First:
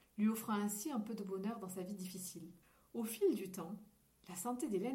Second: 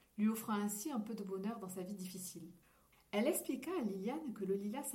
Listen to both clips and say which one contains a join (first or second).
second